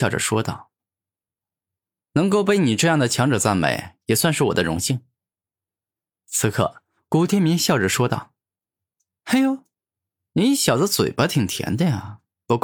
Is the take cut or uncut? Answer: uncut